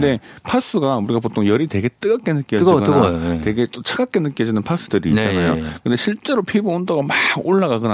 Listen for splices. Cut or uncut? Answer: uncut